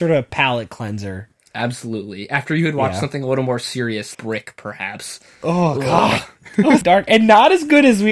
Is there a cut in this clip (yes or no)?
yes